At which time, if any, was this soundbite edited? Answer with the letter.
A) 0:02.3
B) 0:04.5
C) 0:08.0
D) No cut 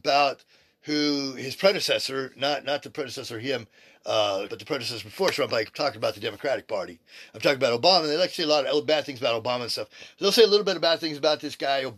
B